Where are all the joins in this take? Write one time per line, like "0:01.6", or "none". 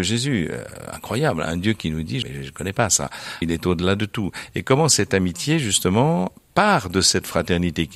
0:02.2
0:03.4